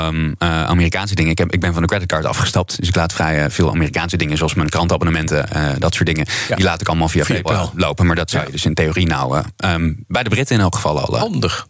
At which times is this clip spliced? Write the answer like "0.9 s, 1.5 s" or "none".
7.4 s